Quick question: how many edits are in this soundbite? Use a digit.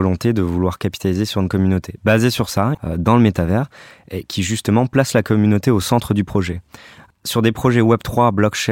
1